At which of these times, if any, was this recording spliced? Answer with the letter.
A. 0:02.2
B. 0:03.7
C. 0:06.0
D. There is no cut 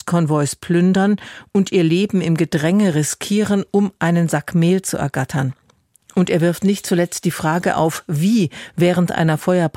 C